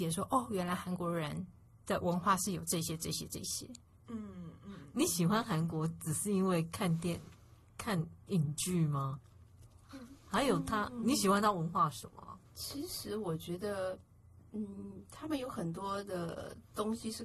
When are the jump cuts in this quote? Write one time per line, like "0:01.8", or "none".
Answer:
0:12.5

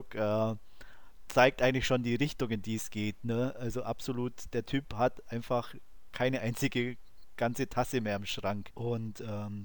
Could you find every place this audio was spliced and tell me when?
0:08.7

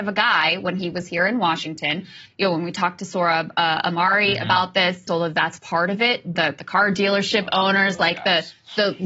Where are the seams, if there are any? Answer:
0:02.3
0:05.1
0:06.4

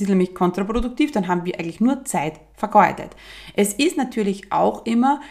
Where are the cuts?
none

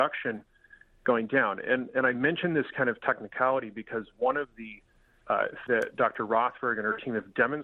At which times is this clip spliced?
0:05.7

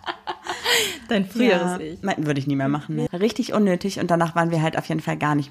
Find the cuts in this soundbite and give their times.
0:03.1

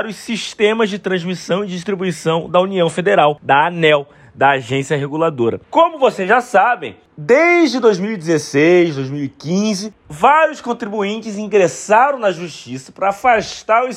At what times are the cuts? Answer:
0:05.6

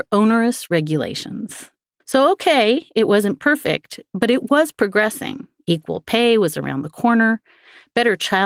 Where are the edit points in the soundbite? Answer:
0:02.0

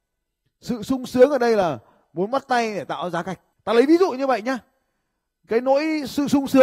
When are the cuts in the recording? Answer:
0:03.6

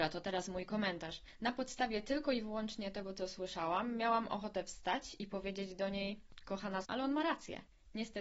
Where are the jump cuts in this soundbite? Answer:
0:06.8

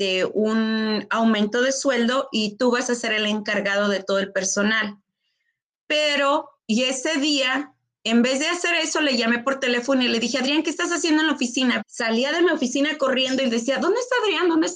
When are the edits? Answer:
0:06.6
0:11.8

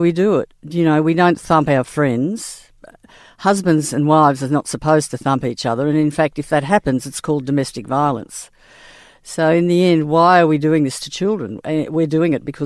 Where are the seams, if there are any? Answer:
none

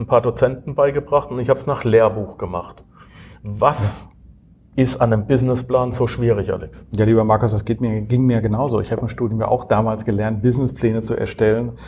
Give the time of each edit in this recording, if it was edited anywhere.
none

